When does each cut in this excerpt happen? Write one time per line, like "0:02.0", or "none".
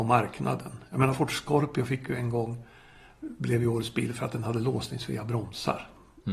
none

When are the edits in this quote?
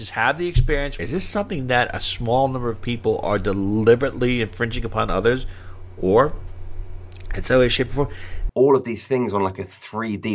0:01.0
0:08.5

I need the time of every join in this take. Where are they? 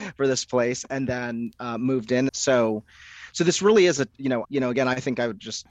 0:02.3
0:04.4

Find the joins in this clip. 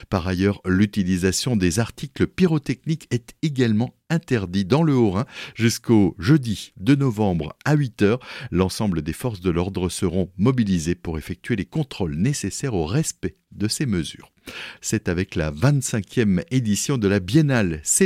0:14.8

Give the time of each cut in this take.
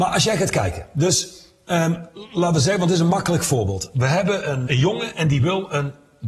0:04.7

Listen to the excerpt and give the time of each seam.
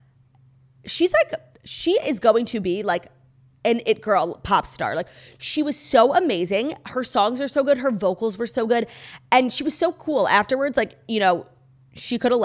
none

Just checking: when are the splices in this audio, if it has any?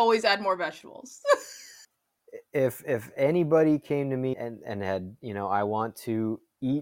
0:04.3

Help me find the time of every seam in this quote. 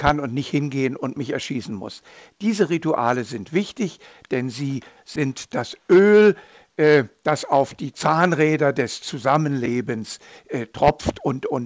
none

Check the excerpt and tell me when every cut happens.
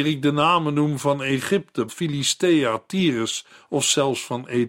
0:01.9

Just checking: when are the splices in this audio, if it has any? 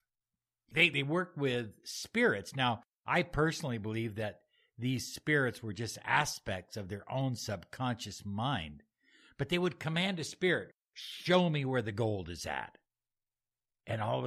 none

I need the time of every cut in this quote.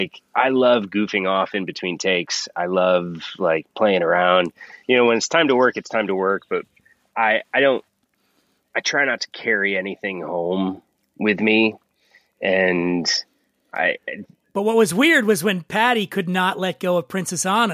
none

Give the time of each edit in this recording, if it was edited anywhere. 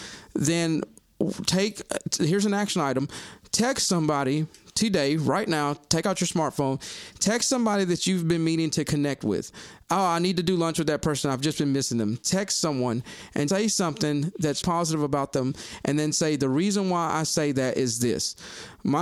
0:13.5
0:14.6

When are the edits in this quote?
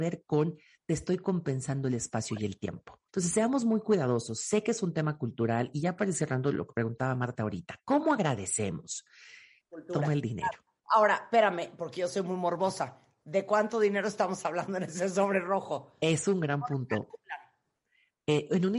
0:03.1
0:09.6

